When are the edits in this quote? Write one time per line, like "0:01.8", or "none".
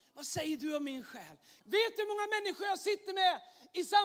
0:01.6